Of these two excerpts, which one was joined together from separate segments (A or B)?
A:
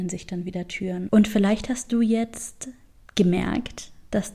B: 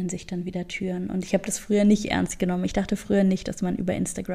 A